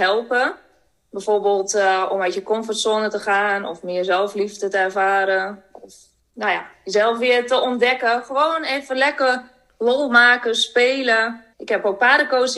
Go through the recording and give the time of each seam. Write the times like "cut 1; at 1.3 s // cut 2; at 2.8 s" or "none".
cut 1; at 11.5 s